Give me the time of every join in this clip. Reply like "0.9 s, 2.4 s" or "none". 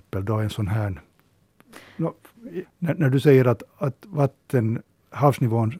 2.6 s